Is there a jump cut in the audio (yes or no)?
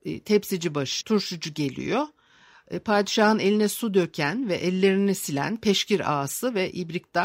yes